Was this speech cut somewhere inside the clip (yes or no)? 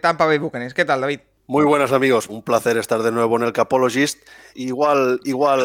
yes